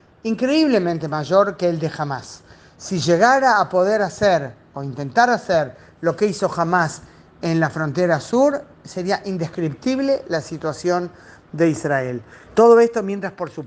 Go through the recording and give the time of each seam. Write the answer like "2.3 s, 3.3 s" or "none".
12.5 s